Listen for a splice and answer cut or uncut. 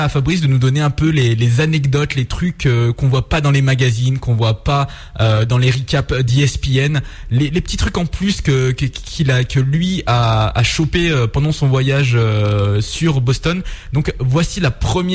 uncut